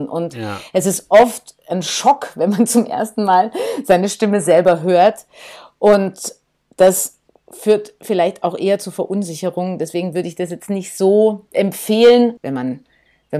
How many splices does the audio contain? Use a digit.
1